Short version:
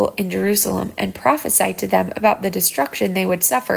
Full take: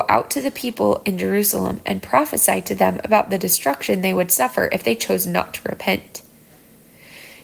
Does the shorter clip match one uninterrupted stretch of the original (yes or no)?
yes